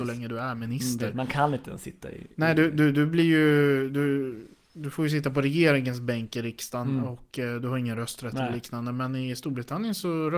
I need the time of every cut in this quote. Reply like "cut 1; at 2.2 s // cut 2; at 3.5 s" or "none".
none